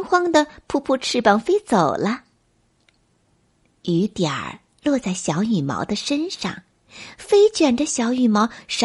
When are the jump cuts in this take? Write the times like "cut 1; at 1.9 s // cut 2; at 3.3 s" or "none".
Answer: none